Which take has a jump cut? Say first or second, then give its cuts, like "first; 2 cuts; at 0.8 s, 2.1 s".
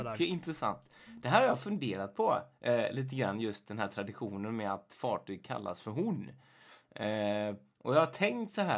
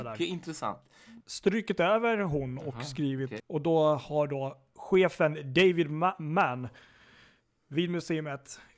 second; 2 cuts; at 1.2 s, 3.4 s